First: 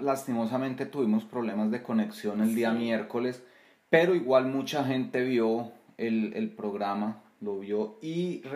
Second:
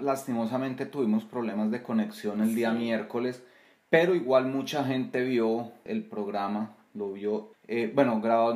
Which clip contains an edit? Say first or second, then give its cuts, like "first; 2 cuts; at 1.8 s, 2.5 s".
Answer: second; 2 cuts; at 5.9 s, 7.5 s